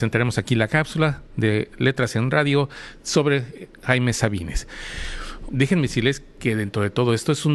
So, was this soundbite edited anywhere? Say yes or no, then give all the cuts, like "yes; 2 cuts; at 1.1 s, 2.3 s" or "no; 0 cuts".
yes; 1 cut; at 5.5 s